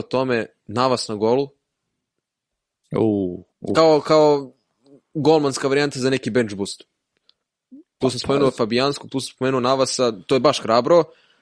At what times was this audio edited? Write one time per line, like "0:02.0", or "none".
0:03.5